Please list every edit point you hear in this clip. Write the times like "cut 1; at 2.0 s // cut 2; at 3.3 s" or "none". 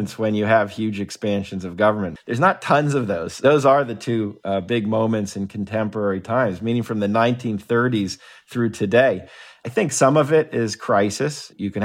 cut 1; at 2.2 s